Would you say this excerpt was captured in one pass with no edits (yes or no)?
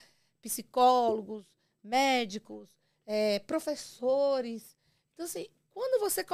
yes